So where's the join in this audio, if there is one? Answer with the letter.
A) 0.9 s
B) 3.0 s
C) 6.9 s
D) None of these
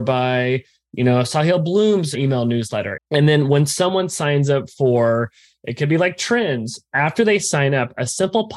B